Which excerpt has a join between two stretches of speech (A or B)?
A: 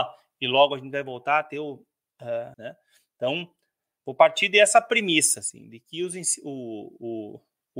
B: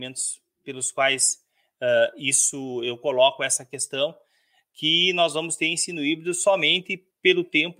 A